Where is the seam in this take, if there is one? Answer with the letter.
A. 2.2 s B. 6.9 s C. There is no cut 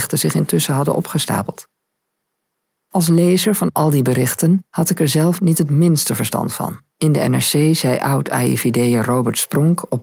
B